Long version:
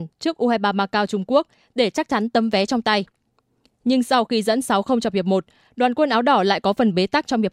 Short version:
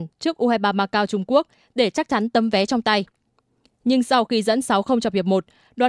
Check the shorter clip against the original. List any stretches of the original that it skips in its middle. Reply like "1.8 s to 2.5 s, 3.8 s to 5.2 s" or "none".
none

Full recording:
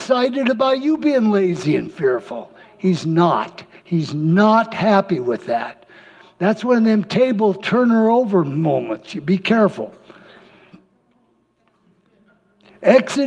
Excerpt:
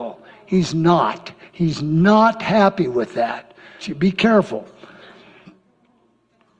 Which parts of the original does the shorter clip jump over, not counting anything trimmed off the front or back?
6.1 s to 9.1 s

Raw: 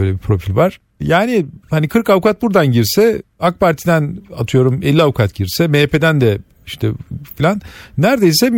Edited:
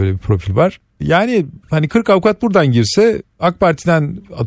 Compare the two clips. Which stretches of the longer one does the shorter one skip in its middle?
none

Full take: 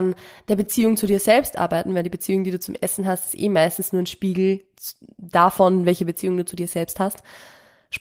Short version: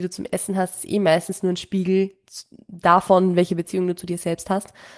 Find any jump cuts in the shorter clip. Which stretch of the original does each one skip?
none

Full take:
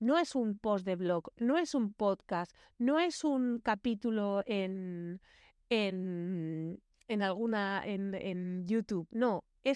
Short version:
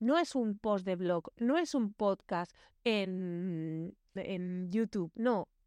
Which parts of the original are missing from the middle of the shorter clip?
2.8 s to 5.6 s, 7.0 s to 8.1 s

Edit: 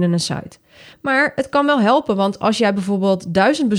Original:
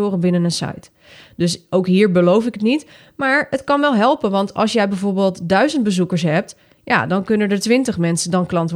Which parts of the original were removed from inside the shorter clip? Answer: 1.2 s to 3.1 s

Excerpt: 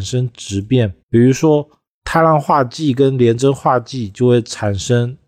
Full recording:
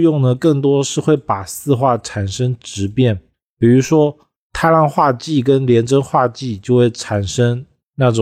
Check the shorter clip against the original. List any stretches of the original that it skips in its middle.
3.3 s to 3.5 s

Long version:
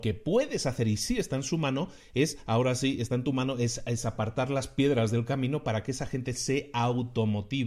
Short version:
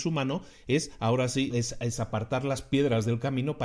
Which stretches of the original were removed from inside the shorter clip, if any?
3.0 s to 3.6 s

